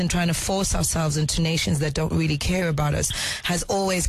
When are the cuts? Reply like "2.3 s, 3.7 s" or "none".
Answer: 3.1 s